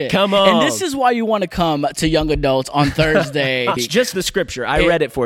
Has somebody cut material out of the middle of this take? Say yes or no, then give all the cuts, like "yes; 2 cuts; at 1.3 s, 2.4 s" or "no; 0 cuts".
yes; 1 cut; at 3.8 s